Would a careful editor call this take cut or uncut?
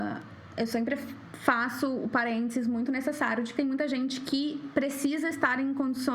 uncut